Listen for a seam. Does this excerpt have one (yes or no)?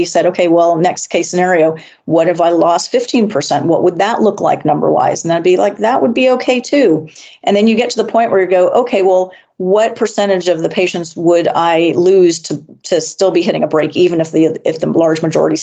no